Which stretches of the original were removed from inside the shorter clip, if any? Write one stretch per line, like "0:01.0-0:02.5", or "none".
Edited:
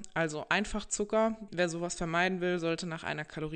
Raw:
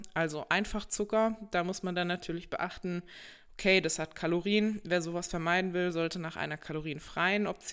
0:01.5-0:04.8